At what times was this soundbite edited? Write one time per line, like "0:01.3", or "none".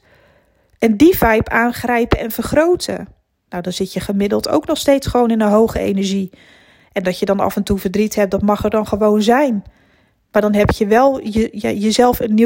none